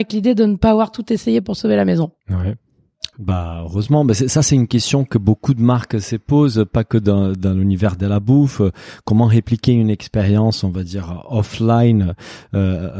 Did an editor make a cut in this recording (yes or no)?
yes